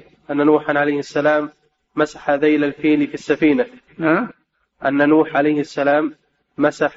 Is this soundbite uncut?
yes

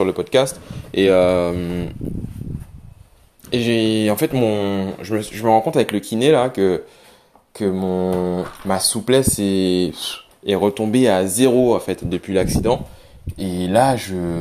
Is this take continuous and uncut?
yes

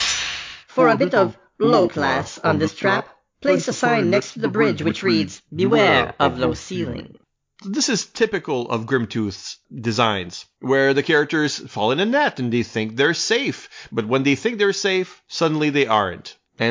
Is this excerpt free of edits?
yes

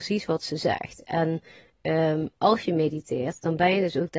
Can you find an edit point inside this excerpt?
no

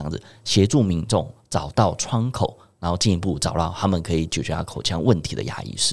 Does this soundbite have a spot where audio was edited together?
no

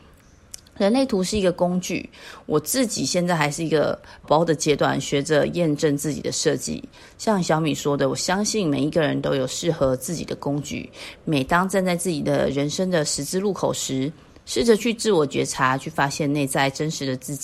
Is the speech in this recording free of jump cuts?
no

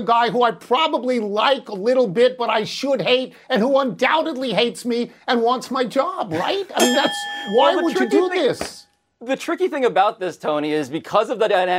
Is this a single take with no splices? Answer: yes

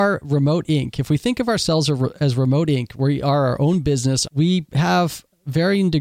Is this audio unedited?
no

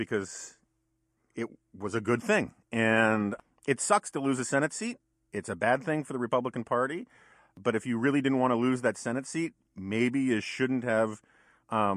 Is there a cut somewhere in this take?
no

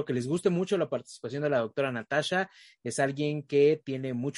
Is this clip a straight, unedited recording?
yes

